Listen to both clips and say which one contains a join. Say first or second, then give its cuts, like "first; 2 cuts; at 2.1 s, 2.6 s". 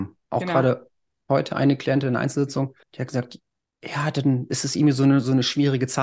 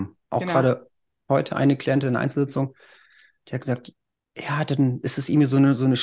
first; 1 cut; at 2.8 s